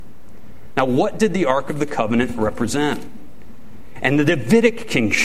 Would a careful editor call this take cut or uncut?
cut